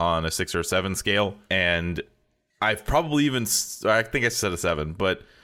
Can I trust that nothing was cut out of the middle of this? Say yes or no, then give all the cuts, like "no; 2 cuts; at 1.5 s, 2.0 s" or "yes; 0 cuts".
yes; 0 cuts